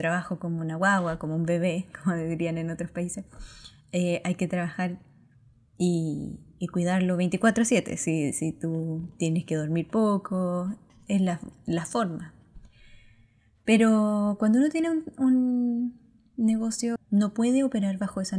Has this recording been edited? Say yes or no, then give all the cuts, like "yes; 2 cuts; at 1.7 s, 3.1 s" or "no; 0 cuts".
yes; 1 cut; at 17.0 s